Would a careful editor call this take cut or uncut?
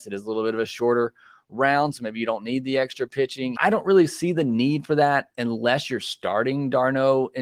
cut